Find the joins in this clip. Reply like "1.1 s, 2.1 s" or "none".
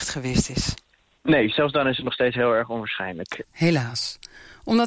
3.4 s